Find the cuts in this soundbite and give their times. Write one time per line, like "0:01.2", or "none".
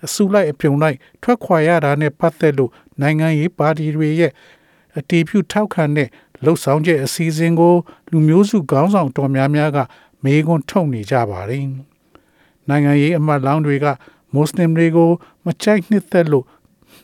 none